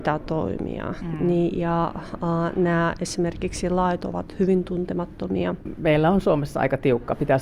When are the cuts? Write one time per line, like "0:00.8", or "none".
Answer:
none